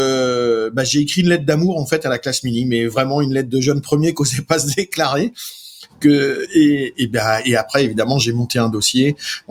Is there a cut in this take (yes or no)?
no